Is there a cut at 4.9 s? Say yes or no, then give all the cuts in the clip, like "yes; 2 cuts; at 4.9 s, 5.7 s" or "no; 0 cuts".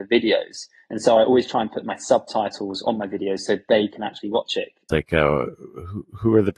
yes; 1 cut; at 4.9 s